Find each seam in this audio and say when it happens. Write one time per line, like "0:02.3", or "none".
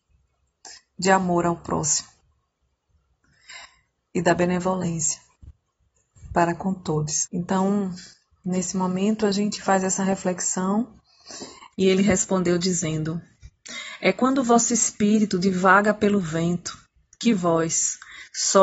0:07.3
0:11.7